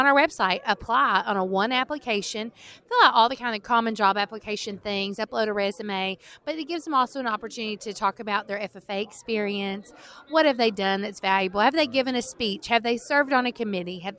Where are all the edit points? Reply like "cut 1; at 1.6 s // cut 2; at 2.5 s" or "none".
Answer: none